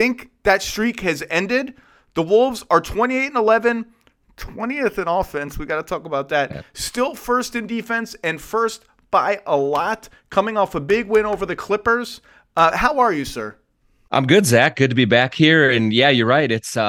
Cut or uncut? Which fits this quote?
uncut